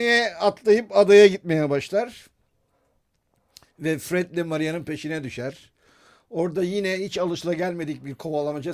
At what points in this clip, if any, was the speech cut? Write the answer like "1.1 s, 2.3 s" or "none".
none